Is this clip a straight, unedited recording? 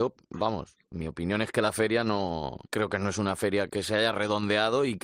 no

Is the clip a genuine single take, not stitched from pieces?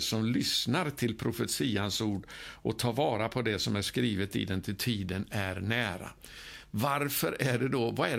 yes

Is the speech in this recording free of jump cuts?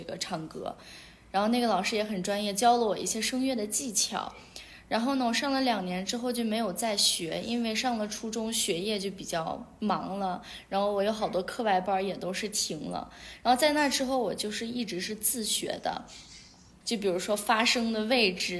no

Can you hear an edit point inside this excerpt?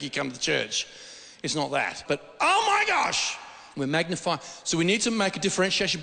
yes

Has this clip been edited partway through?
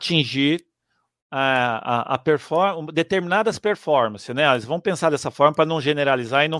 no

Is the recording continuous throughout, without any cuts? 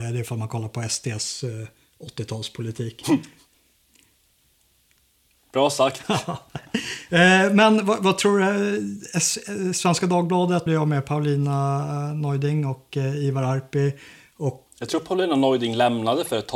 no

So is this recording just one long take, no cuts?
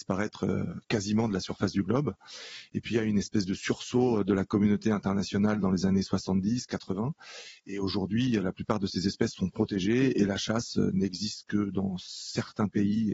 yes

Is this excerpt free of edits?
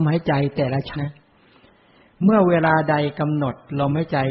no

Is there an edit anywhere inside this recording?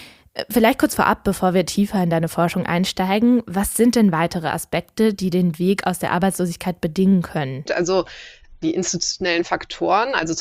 yes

